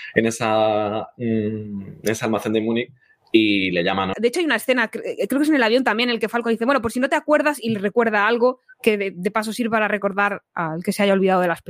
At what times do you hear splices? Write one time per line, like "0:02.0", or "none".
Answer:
0:04.1